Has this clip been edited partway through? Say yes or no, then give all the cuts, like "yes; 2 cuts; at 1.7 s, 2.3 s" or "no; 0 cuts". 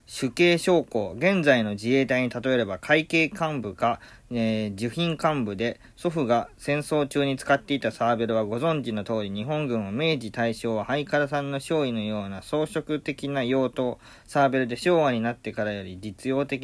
no; 0 cuts